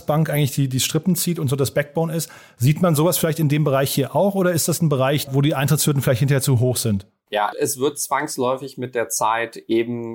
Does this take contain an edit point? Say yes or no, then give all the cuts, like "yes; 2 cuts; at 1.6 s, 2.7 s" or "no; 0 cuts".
yes; 2 cuts; at 5.3 s, 7.5 s